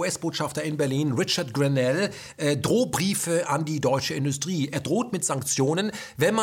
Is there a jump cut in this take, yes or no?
no